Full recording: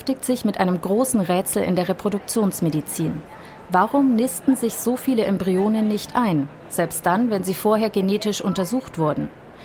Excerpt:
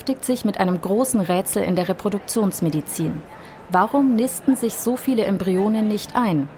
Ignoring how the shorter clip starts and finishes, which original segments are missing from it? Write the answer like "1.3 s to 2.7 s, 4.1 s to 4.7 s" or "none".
none